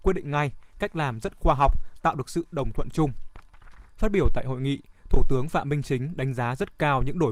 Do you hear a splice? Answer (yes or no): yes